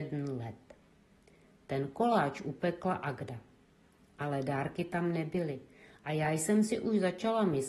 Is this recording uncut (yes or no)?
yes